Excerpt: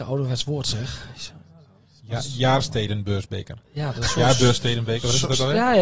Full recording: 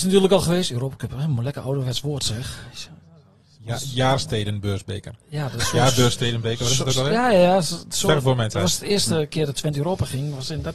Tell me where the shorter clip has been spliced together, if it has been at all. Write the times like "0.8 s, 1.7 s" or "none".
none